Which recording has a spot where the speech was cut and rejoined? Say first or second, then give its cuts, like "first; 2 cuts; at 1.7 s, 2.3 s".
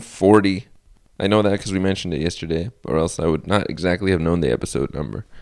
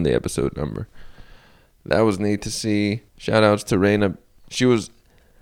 second; 1 cut; at 3.1 s